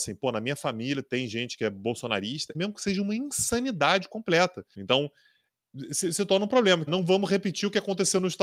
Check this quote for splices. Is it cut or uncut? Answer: cut